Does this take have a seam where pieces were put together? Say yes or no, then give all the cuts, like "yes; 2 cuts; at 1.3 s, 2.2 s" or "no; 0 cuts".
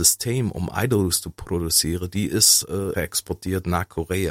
yes; 1 cut; at 2.9 s